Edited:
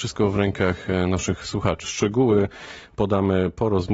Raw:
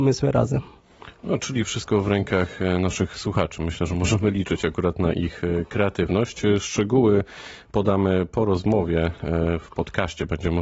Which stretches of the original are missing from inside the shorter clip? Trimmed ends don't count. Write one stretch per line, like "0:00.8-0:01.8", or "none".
0:03.6-0:06.6